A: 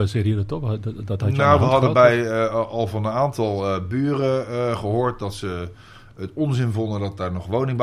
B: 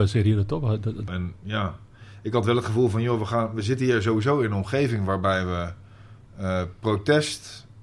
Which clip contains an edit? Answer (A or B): B